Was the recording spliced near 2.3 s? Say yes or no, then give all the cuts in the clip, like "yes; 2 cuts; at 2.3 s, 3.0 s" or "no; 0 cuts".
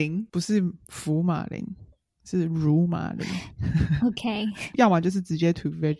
no; 1 cut; at 4.7 s